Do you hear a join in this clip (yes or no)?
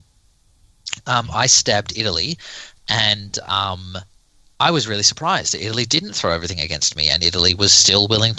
no